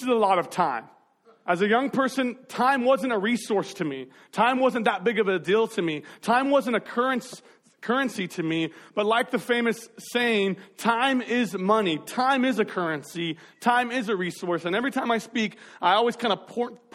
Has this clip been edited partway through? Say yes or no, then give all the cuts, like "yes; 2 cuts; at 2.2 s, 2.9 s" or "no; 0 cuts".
no; 0 cuts